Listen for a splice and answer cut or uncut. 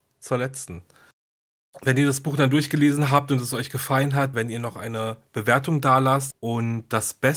cut